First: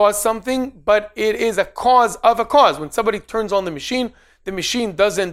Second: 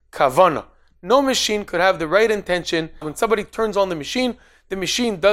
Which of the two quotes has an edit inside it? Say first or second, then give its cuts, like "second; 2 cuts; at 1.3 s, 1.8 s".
second; 1 cut; at 3.0 s